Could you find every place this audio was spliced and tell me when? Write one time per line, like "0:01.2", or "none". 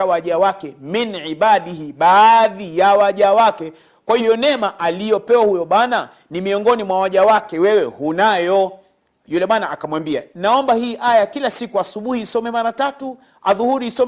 0:04.2